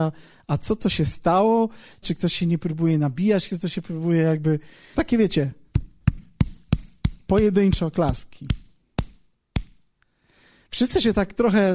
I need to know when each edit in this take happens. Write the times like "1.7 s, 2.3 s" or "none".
2.0 s, 4.9 s